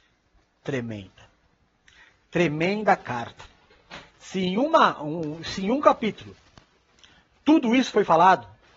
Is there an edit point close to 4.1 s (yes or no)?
yes